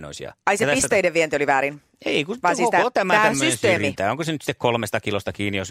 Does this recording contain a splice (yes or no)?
no